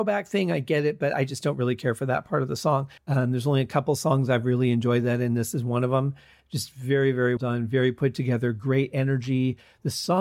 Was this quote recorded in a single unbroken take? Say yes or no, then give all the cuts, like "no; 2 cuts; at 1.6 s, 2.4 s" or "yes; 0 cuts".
no; 2 cuts; at 3.0 s, 7.4 s